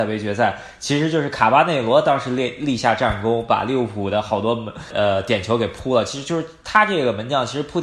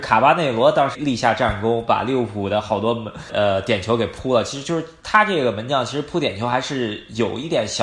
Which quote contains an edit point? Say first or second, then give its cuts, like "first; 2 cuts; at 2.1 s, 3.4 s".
second; 1 cut; at 0.9 s